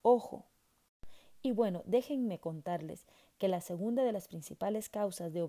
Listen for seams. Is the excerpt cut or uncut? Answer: uncut